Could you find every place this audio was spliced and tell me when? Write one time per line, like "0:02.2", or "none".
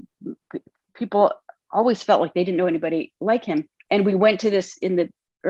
none